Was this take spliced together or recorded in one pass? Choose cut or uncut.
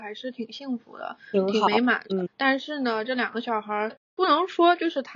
cut